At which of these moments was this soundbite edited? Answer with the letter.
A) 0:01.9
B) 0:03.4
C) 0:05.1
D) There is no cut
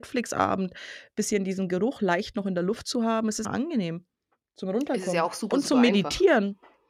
B